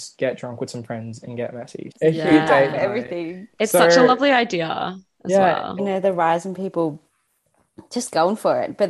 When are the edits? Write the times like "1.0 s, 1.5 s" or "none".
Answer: 1.9 s, 5.8 s

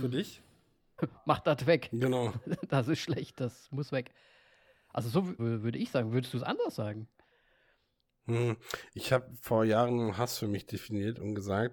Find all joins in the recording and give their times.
1.0 s, 5.4 s

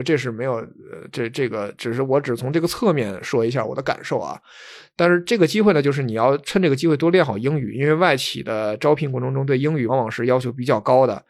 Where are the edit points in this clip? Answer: 9.9 s

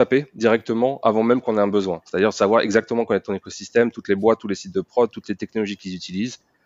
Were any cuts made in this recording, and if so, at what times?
none

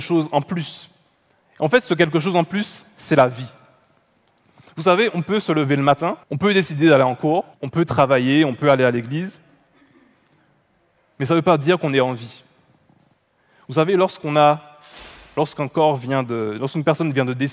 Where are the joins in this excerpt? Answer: 6.2 s, 7.5 s

